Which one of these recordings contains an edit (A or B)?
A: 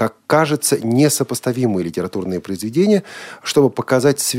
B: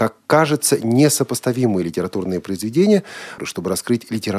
B